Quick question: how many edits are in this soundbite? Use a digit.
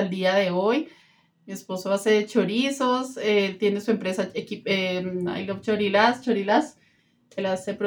0